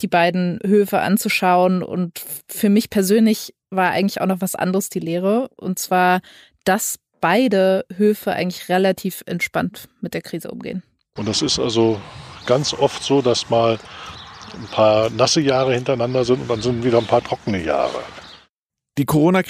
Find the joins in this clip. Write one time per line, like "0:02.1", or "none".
0:11.2